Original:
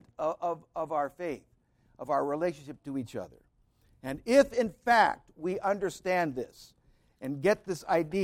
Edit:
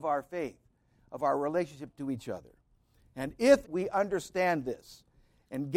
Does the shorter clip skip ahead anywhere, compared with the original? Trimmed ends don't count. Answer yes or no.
yes